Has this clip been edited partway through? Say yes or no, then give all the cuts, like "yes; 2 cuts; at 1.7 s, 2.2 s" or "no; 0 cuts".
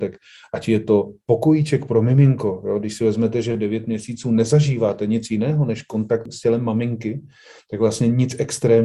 no; 0 cuts